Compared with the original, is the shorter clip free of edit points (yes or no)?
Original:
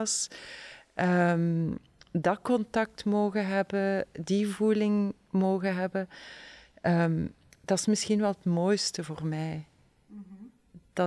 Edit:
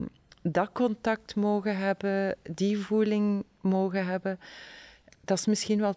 no